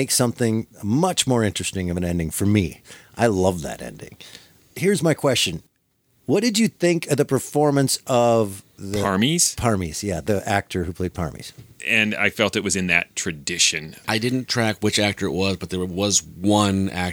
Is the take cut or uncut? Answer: cut